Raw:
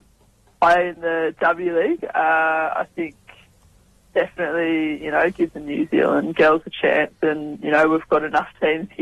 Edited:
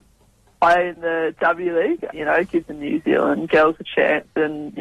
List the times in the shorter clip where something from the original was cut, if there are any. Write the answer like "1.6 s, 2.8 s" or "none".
2.1 s

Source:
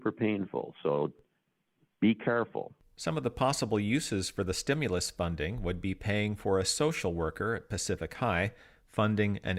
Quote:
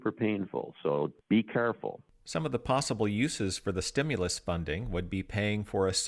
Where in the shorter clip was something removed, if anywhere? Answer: 1.2 s

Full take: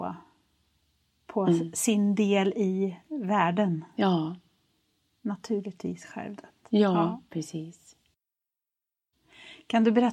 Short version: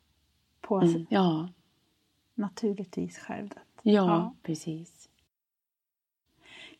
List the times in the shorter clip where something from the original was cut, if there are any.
1.1 s

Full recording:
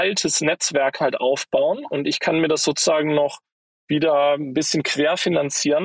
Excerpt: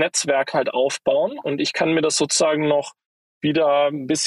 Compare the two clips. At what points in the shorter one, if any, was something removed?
none

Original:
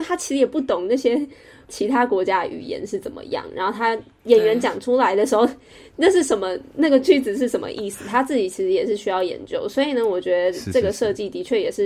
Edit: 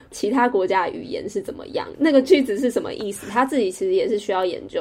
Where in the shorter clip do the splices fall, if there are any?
1.9 s

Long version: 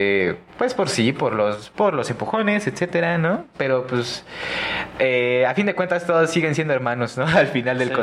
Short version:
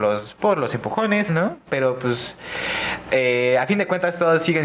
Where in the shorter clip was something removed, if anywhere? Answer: 1.3 s

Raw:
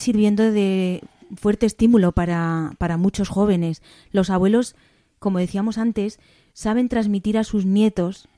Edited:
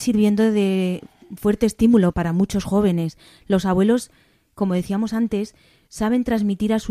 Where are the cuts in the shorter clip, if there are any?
2.1 s

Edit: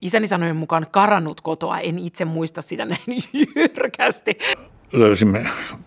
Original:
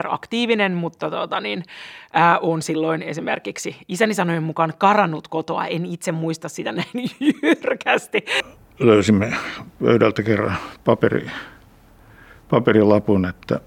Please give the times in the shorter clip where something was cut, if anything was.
none

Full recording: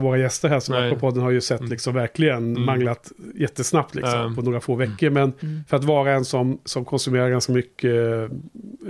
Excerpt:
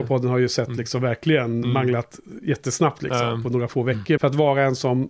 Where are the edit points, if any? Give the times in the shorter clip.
4.2 s

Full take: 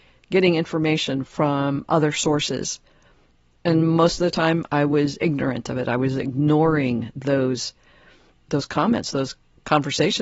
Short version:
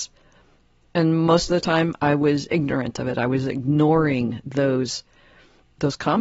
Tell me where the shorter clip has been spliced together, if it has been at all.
none

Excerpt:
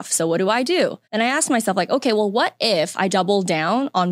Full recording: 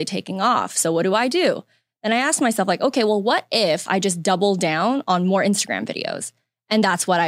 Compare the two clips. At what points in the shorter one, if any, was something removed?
1.0 s, 3.1 s

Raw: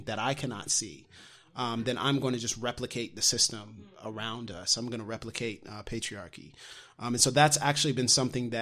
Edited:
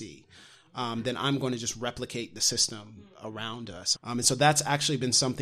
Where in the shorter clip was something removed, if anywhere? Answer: 3.9 s

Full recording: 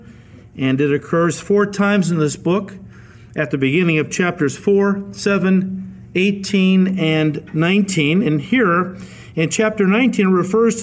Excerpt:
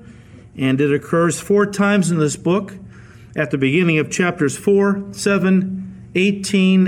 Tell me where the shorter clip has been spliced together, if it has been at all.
none

